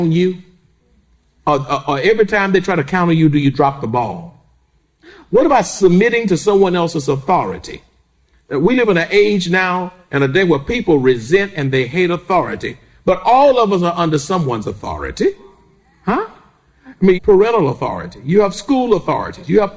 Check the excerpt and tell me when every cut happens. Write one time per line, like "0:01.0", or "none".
0:17.1